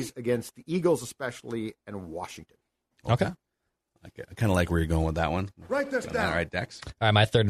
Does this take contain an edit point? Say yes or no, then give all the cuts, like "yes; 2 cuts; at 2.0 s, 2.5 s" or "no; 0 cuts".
no; 0 cuts